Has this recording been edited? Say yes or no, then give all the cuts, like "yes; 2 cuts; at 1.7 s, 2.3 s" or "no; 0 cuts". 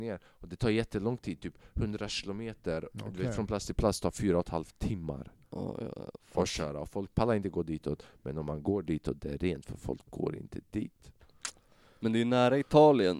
no; 0 cuts